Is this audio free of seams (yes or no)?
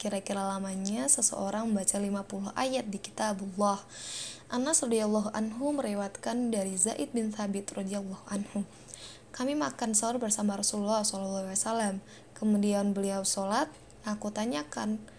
yes